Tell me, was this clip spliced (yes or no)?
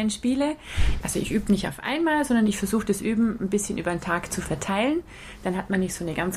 yes